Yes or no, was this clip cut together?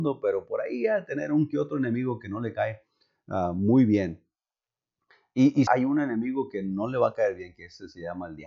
yes